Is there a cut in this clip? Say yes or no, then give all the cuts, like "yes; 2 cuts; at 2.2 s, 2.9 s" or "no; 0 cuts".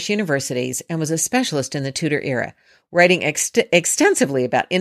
no; 0 cuts